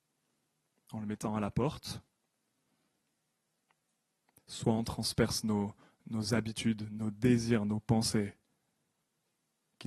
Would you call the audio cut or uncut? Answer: uncut